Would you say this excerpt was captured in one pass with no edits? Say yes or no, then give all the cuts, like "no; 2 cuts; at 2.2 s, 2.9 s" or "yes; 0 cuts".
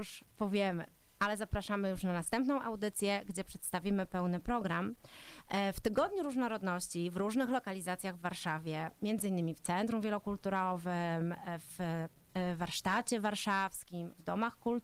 yes; 0 cuts